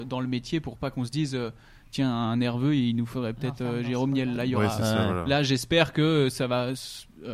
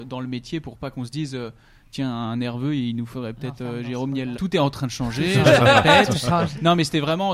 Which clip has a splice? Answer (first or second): second